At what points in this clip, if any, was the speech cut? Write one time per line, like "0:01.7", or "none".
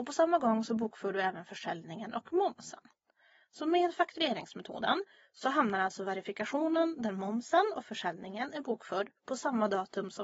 none